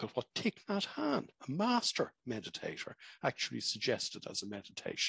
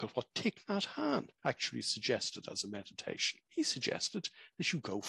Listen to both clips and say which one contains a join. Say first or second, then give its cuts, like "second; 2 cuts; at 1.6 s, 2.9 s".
second; 2 cuts; at 1.4 s, 3.4 s